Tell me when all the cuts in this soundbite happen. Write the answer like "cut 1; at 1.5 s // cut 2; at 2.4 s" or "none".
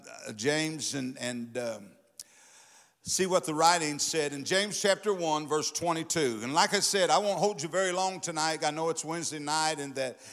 none